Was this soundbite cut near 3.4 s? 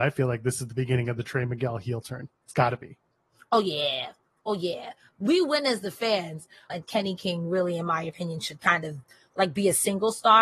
no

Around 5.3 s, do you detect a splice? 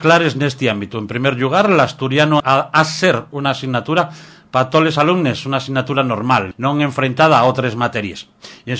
no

